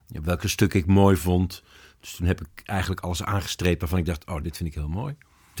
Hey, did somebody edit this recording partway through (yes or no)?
yes